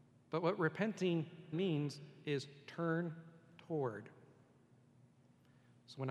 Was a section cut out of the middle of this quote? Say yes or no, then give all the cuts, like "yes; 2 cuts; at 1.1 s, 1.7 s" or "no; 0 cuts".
yes; 1 cut; at 1.5 s